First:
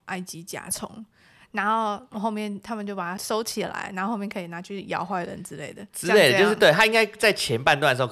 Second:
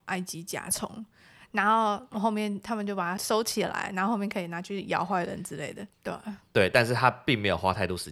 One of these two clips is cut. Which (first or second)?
second